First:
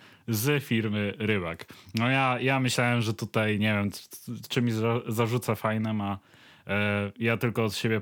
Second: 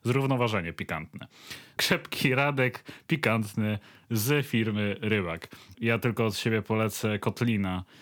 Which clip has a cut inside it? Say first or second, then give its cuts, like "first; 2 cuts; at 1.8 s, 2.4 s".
second; 2 cuts; at 1.8 s, 5.7 s